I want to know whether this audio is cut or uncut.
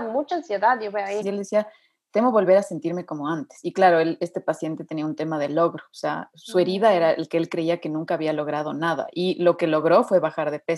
cut